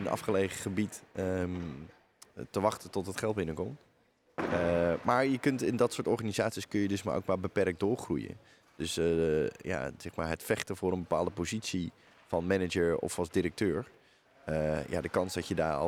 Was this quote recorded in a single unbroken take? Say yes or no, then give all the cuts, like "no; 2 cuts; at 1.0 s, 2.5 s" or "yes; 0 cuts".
yes; 0 cuts